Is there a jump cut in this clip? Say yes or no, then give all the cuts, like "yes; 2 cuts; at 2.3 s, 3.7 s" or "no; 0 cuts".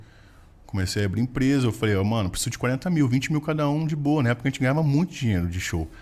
no; 0 cuts